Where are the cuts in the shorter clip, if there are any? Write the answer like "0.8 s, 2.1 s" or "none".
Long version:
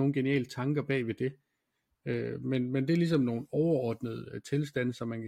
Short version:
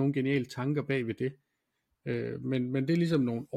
none